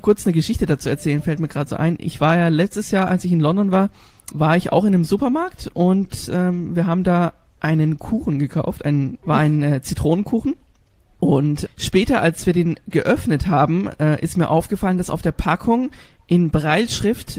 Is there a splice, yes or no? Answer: yes